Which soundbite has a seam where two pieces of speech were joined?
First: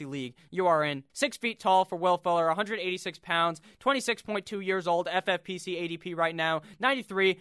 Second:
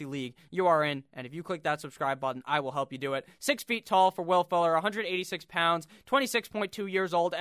first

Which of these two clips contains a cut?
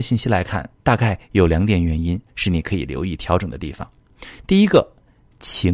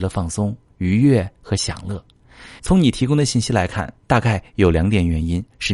second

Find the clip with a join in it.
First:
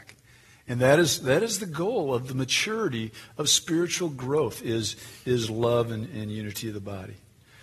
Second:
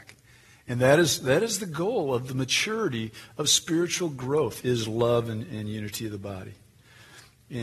second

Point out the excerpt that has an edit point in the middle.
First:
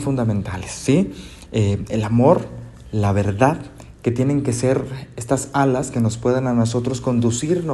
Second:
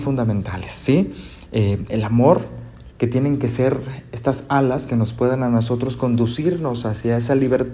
second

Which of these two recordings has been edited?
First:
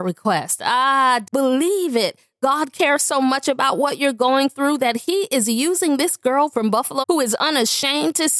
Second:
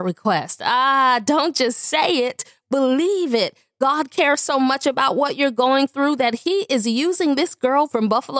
first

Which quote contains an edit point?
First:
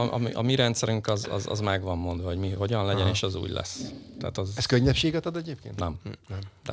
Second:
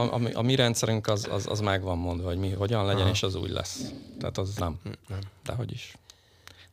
second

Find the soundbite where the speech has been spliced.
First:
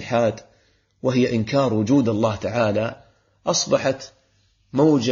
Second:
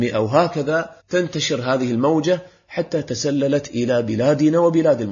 second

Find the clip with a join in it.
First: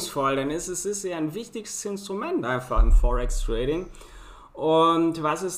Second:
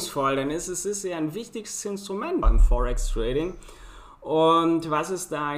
second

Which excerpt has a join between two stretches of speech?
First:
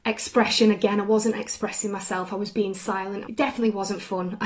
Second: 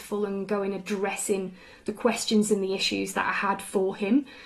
first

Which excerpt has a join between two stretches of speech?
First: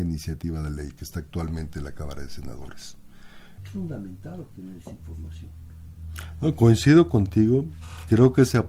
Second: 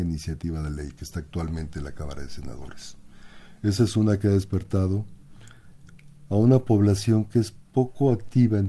first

